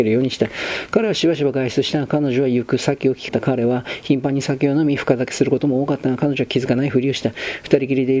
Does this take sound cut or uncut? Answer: cut